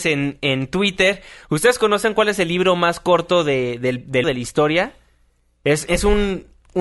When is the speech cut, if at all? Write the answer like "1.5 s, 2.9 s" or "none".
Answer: 4.2 s, 5.9 s